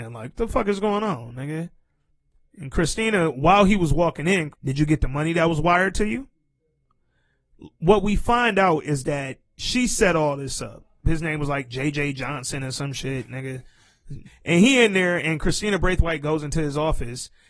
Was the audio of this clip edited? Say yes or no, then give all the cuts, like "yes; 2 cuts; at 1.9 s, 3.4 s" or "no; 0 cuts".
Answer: yes; 3 cuts; at 4.5 s, 11.0 s, 14.2 s